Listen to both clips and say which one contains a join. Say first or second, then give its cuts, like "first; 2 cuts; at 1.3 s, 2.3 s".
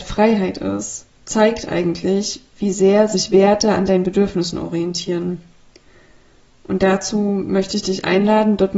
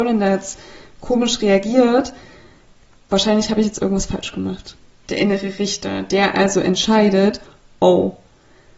second; 1 cut; at 5.0 s